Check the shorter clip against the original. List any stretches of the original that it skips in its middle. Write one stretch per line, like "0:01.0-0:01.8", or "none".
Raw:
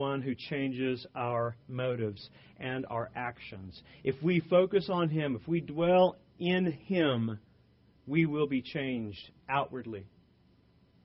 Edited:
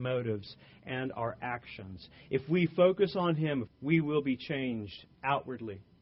0:05.4-0:07.9